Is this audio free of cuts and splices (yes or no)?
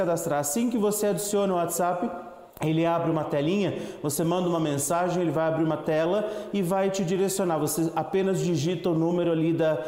no